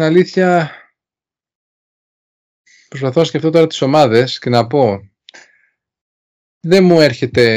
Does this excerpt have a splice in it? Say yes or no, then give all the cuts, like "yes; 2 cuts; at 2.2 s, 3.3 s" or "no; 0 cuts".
no; 0 cuts